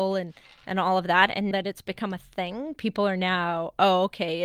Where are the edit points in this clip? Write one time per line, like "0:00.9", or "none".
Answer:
0:01.5